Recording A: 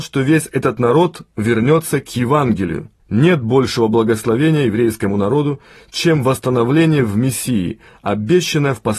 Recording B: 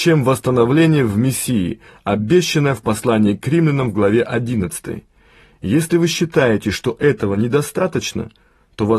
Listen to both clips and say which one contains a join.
A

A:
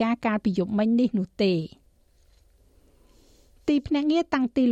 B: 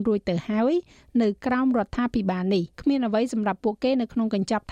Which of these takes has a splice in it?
B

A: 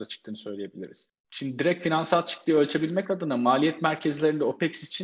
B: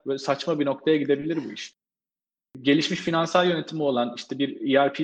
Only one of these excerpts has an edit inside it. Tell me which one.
A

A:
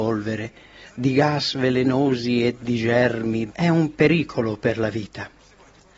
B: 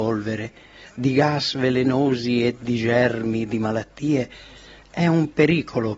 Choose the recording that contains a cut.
A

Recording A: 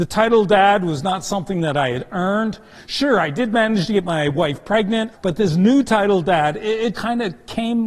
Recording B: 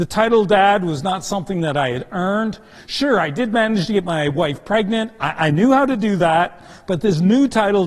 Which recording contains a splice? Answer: A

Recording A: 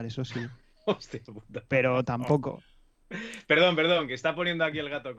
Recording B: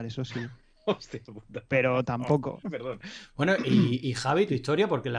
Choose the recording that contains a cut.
B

